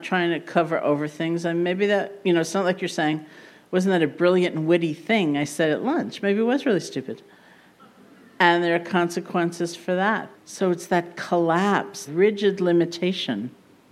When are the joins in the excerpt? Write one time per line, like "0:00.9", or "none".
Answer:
0:10.3
0:12.1